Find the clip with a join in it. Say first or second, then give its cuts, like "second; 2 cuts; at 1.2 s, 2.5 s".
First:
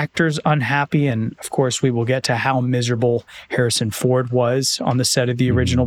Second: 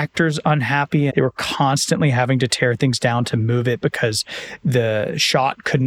second; 1 cut; at 1.1 s